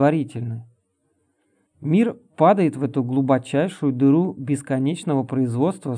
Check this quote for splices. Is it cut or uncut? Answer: cut